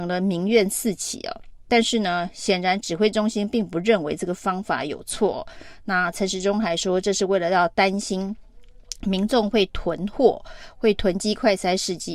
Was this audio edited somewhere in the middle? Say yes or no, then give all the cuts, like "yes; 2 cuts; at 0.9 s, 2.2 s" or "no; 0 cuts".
no; 0 cuts